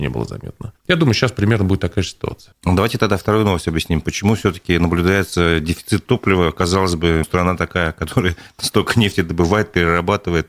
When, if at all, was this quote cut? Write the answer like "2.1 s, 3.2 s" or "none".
2.5 s, 7.2 s